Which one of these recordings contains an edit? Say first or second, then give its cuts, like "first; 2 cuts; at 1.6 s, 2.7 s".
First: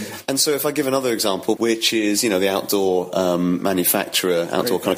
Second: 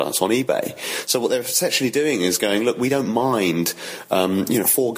first; 1 cut; at 1.6 s